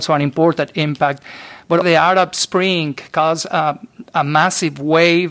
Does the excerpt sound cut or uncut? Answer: cut